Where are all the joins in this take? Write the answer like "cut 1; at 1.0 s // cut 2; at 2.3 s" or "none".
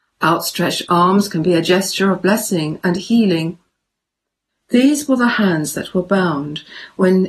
cut 1; at 4.5 s